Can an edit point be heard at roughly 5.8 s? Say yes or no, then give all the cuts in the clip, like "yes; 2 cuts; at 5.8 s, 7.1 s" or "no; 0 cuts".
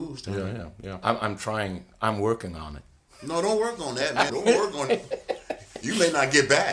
no; 2 cuts; at 1.0 s, 4.3 s